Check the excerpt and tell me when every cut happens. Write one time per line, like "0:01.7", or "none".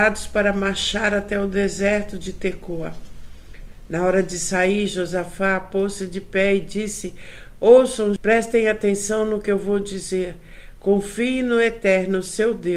0:08.2